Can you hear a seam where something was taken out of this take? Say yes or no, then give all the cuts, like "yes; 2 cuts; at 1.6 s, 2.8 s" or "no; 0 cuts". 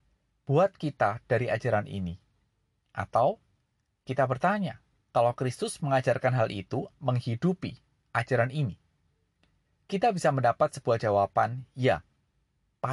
yes; 1 cut; at 6.9 s